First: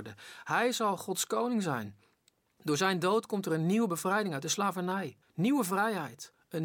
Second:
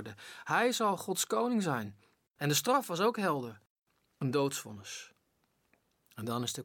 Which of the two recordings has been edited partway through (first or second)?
second